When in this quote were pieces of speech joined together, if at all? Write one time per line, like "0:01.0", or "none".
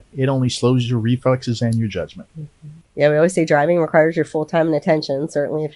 0:02.8